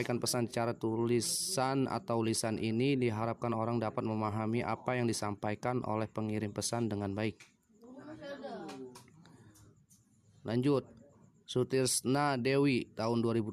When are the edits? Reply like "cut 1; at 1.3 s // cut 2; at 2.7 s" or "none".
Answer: none